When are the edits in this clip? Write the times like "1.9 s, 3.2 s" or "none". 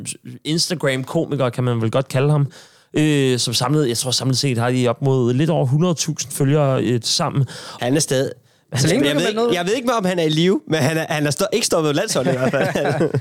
7.8 s